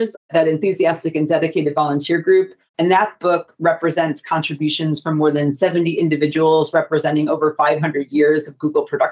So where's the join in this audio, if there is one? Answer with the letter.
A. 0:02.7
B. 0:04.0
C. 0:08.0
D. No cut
A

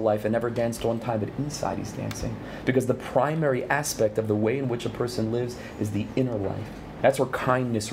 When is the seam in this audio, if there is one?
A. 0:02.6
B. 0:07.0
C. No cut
B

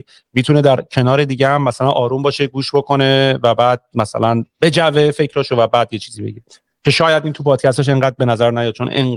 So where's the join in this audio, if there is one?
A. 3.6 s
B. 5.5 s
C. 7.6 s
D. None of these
B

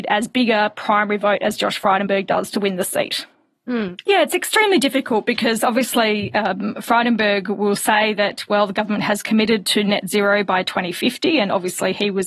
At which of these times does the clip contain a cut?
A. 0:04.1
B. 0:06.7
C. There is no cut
A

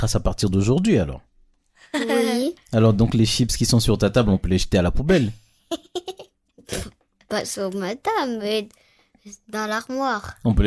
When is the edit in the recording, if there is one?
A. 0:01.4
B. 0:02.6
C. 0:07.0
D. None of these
D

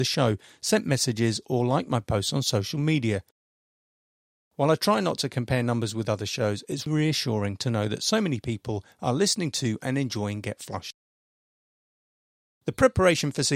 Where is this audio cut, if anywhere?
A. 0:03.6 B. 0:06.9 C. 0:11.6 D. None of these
B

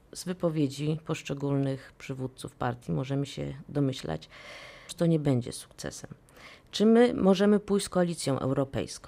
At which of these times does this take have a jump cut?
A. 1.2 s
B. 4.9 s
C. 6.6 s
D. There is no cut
B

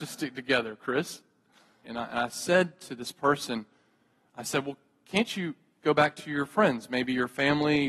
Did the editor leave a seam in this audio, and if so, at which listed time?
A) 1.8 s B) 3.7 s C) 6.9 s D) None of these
A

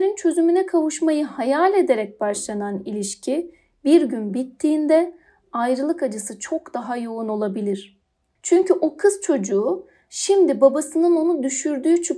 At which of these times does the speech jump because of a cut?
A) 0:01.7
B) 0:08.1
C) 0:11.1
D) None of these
D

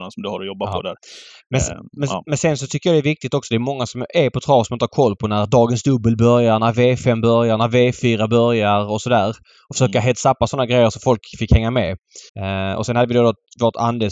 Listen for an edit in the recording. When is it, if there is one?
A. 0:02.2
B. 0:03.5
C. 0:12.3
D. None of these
C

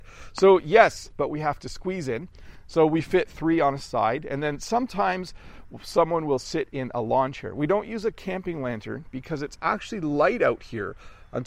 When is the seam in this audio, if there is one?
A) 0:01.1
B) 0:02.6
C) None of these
A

